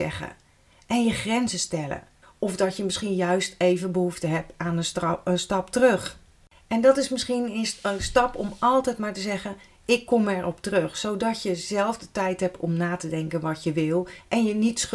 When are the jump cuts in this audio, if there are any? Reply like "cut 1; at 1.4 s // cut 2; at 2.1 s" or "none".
cut 1; at 2.2 s

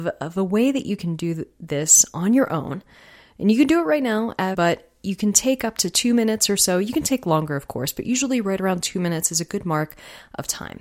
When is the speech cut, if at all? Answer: cut 1; at 4.5 s

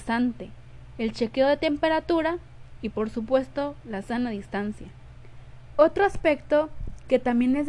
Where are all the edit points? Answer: cut 1; at 5.8 s

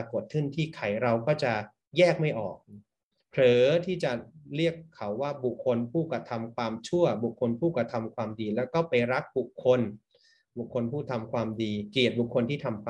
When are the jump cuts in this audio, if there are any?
cut 1; at 5.6 s

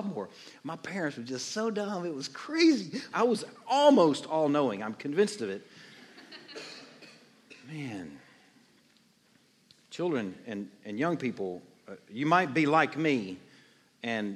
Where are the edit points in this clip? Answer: cut 1; at 3.1 s

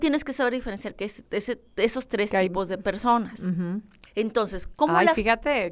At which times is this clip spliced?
cut 1; at 1.2 s // cut 2; at 4.1 s

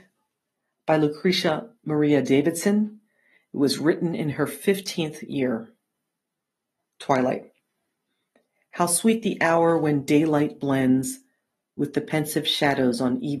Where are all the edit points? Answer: none

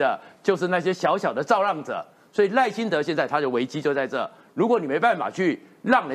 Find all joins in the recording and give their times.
none

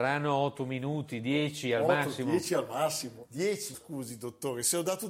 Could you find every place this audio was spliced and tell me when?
cut 1; at 3.7 s

